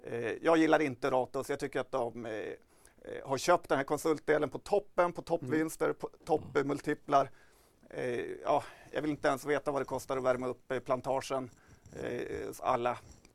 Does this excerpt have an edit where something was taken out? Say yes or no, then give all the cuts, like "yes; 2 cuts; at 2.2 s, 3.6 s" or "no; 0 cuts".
no; 0 cuts